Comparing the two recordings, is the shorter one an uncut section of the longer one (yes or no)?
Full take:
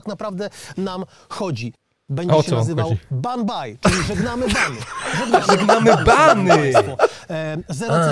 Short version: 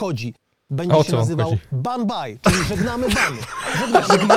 yes